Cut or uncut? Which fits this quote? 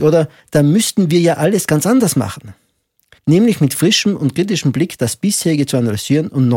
cut